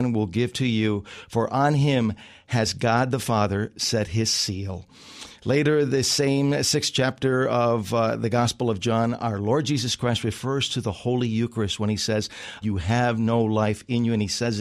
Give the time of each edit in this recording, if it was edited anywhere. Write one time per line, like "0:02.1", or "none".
0:12.6